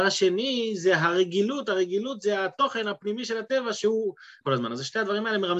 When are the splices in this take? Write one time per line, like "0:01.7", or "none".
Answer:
0:04.4

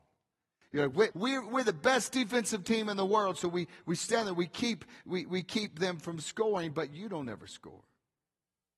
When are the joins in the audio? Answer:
0:01.1

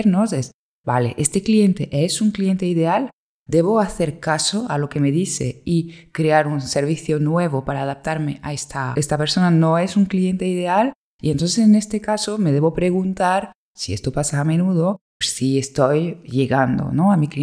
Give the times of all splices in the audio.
0:08.9
0:15.2

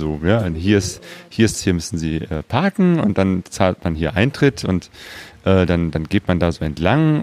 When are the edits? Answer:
0:01.5

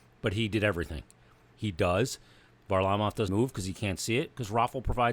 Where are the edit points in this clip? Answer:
0:01.5
0:03.3

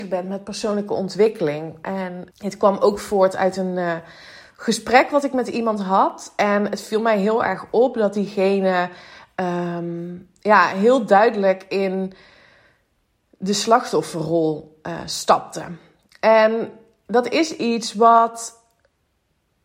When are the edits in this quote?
0:02.3

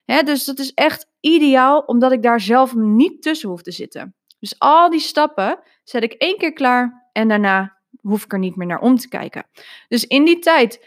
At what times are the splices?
none

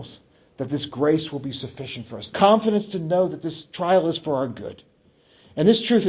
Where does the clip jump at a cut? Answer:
0:02.3

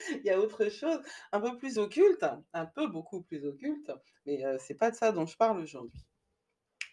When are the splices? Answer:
none

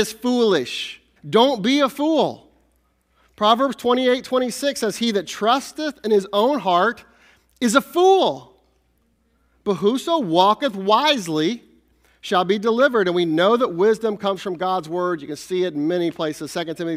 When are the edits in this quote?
0:01.2

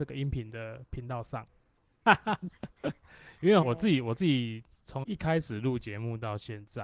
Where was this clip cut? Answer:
0:02.1
0:03.6
0:05.0

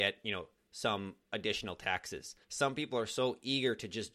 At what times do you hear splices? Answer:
0:02.4

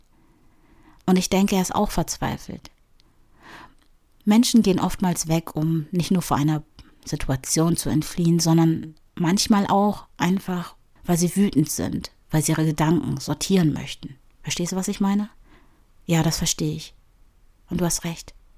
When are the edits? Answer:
0:11.0

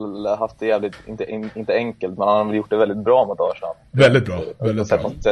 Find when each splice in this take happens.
none

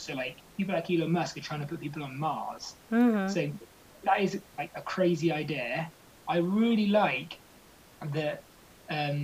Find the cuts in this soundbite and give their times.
none

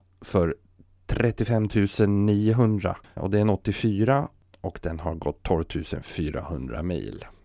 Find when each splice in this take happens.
0:03.2

